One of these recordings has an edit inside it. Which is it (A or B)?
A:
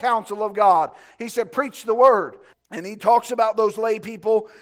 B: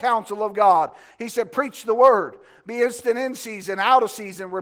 A